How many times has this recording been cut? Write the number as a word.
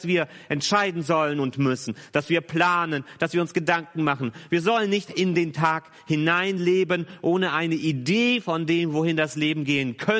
one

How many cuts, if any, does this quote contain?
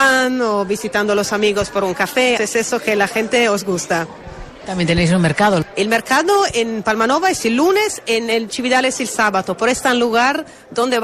two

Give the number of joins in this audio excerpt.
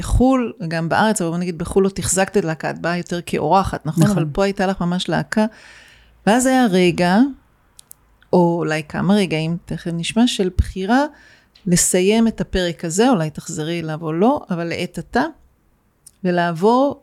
zero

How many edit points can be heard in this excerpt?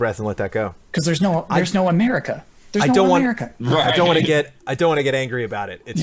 zero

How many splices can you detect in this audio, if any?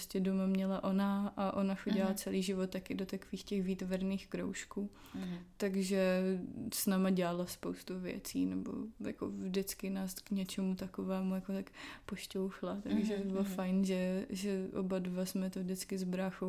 one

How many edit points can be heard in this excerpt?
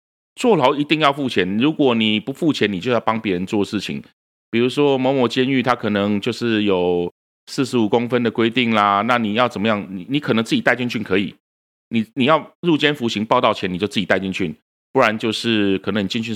zero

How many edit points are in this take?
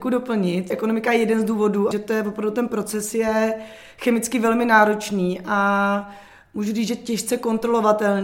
one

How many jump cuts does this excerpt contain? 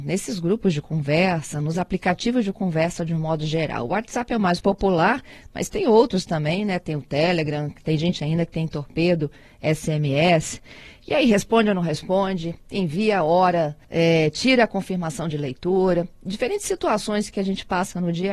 one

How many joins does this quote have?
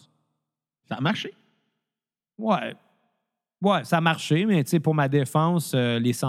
zero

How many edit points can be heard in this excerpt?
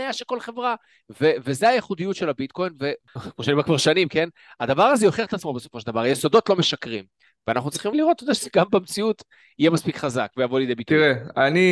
one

